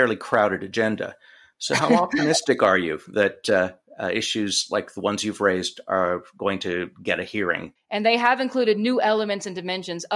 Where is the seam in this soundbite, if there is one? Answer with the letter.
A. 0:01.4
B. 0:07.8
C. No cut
B